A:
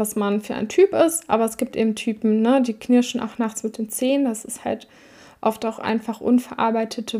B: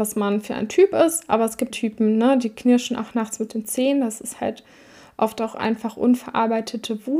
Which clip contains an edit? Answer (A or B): B